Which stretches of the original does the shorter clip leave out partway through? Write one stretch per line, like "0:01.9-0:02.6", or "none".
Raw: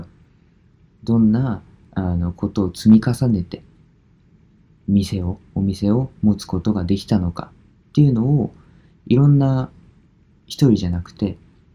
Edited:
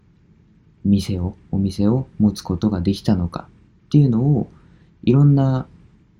none